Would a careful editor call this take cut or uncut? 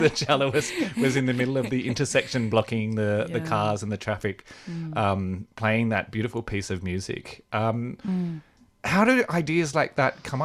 uncut